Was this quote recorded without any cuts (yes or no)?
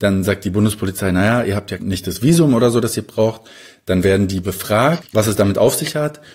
yes